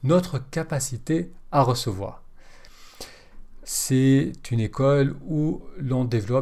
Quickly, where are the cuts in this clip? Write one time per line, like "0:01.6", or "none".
0:03.6